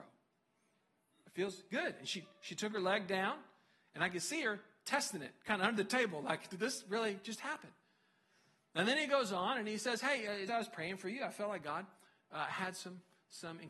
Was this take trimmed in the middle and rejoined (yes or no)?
yes